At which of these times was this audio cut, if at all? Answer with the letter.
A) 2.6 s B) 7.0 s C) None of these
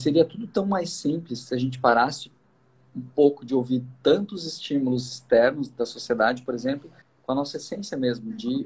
B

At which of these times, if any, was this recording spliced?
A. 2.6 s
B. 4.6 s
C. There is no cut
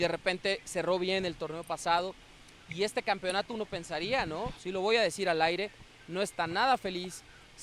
B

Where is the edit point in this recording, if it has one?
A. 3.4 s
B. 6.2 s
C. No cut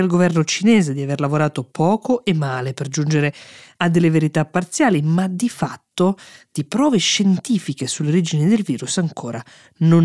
C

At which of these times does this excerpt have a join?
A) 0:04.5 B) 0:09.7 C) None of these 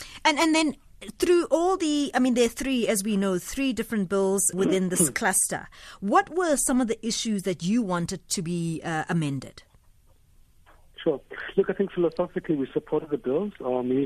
A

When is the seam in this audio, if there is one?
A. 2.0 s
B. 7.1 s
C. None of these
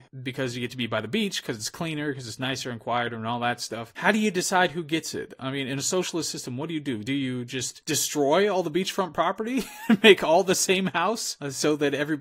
C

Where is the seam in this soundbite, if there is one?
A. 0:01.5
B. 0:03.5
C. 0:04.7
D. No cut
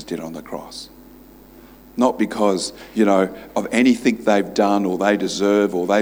D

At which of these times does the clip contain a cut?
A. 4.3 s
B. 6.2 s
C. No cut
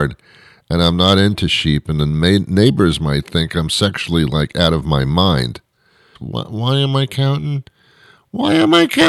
B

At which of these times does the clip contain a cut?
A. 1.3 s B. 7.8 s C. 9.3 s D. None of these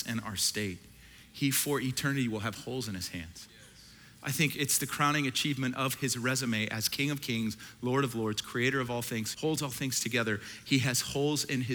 C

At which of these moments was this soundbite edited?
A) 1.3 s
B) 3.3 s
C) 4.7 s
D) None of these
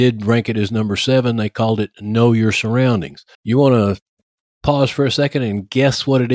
B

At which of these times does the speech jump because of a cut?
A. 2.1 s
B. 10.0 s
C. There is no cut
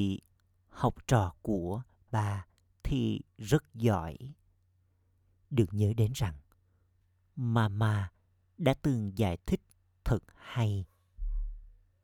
A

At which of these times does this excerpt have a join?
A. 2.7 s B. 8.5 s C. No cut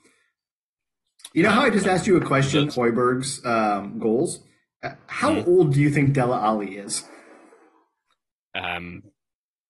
A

